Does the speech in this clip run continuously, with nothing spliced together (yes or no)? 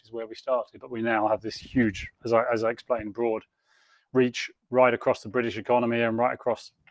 yes